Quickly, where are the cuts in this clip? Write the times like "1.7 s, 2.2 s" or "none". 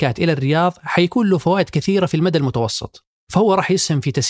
none